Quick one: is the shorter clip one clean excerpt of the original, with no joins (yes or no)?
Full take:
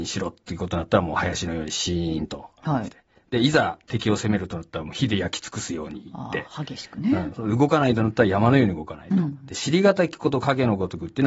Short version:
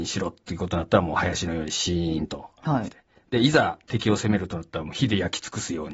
yes